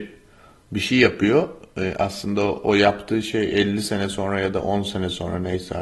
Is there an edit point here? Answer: no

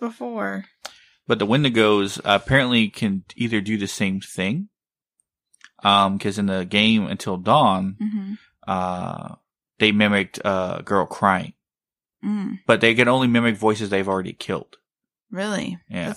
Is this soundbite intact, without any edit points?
yes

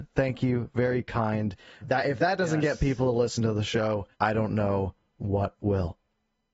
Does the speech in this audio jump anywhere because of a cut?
yes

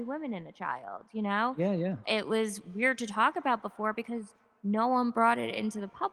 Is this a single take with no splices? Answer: no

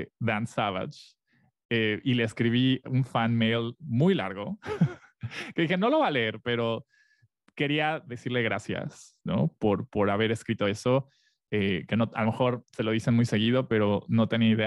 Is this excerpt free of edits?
yes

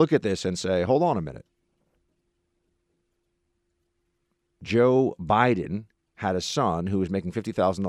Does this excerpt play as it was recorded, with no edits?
yes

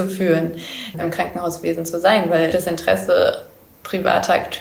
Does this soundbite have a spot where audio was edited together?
yes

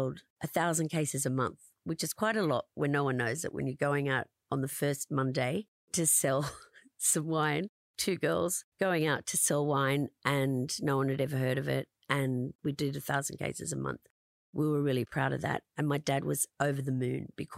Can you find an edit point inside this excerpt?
no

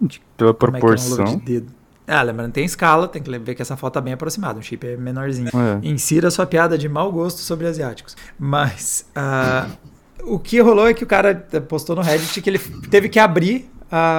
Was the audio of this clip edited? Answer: yes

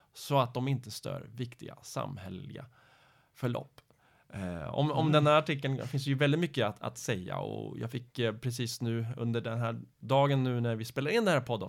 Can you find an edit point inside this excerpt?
no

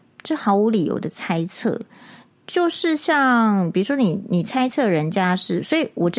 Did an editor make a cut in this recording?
no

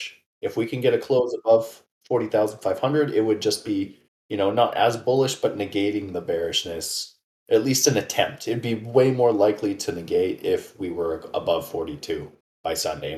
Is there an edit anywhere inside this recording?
no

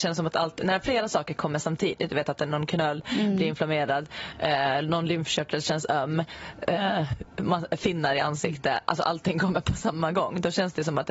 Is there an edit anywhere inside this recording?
no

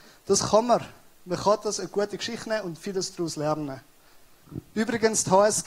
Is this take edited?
no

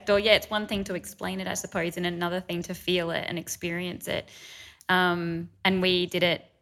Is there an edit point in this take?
no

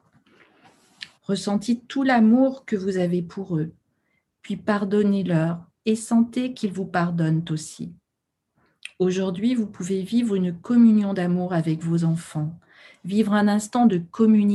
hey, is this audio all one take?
no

